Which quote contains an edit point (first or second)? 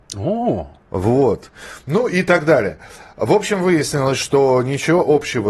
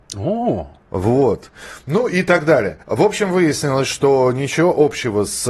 second